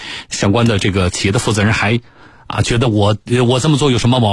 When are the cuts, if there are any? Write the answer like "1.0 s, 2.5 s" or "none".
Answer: none